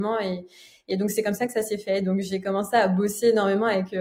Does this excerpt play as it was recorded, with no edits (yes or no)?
yes